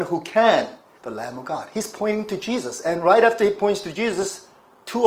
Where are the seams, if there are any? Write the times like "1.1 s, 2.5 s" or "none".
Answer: 1.0 s